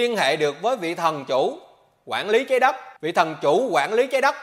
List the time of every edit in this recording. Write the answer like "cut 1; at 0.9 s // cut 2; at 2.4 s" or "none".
cut 1; at 3.0 s